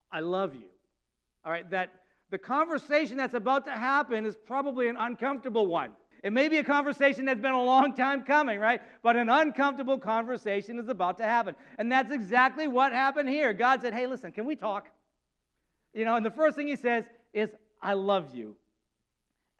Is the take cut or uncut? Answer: cut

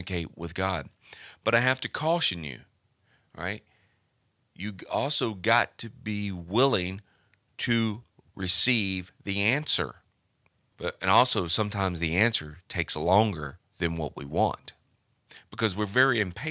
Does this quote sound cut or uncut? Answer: cut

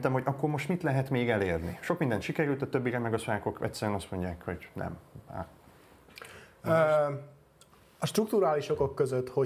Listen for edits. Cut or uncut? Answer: uncut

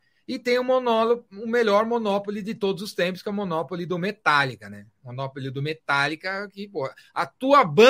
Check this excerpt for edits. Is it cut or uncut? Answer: uncut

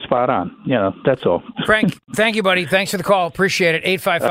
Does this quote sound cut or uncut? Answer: uncut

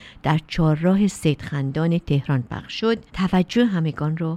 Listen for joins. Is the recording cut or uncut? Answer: cut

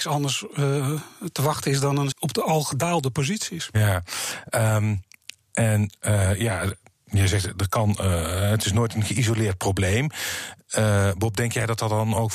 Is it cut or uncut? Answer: cut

